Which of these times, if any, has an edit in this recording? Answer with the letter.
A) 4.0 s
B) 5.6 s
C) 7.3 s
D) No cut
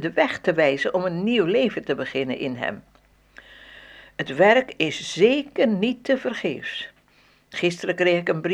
D